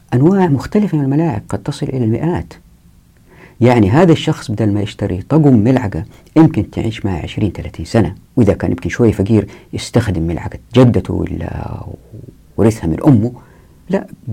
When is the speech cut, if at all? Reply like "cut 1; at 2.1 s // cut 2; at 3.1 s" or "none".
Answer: cut 1; at 8.2 s

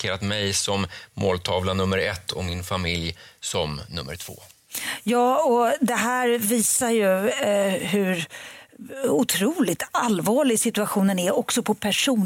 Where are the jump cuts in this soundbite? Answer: none

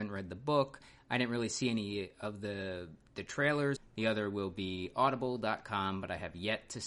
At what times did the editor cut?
cut 1; at 3.8 s

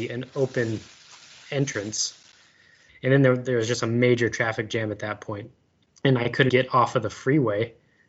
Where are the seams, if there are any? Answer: cut 1; at 2.9 s // cut 2; at 6.5 s

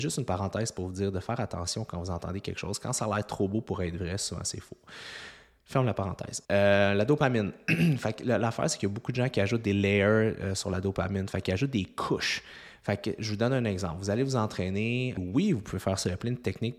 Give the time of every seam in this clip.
cut 1; at 6.4 s // cut 2; at 15.2 s

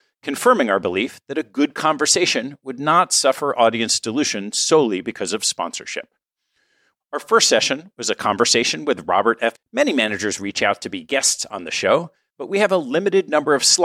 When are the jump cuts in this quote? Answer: cut 1; at 6.9 s // cut 2; at 9.5 s

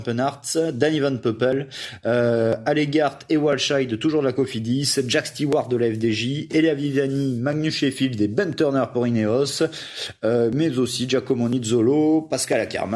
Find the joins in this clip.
none

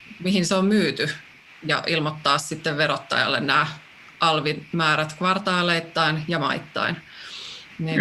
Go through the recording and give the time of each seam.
none

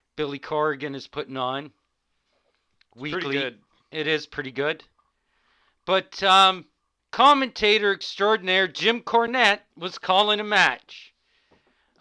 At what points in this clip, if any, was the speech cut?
cut 1; at 7.0 s // cut 2; at 9.7 s

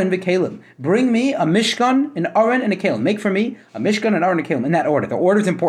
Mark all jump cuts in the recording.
none

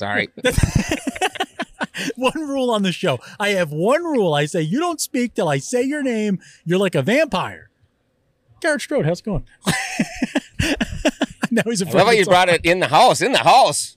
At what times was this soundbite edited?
cut 1; at 10.5 s

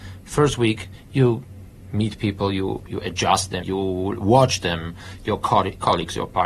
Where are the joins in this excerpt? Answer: cut 1; at 3.6 s // cut 2; at 5.2 s

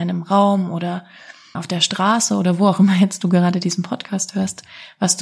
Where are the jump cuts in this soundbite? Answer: cut 1; at 1.5 s

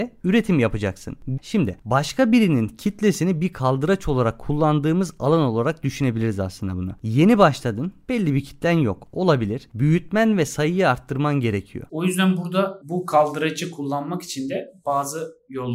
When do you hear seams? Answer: cut 1; at 1.4 s // cut 2; at 11.9 s

